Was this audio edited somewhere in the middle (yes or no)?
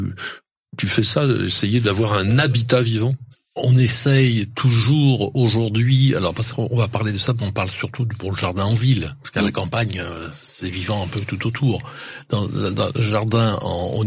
no